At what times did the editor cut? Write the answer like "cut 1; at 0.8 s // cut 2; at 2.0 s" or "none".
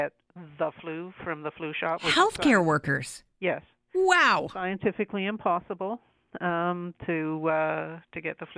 none